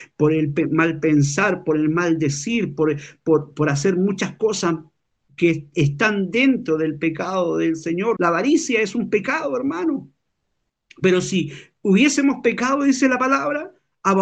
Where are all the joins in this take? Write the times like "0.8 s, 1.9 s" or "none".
8.2 s, 10.9 s